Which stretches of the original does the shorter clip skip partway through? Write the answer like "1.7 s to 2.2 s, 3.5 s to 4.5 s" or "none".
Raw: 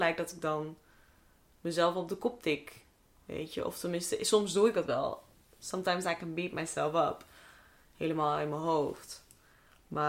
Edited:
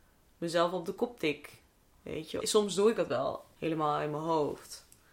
3.6 s to 4.2 s, 5.3 s to 7.9 s